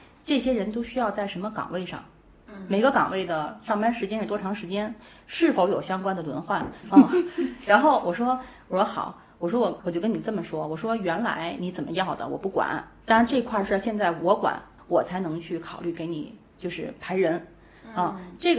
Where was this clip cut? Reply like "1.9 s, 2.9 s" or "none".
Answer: 6.8 s, 14.8 s